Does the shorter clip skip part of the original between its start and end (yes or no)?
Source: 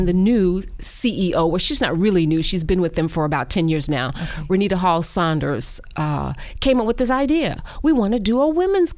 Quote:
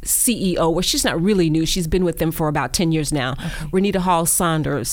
no